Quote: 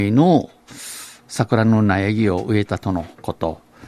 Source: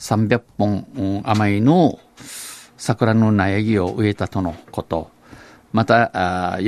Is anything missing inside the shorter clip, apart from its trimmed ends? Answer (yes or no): no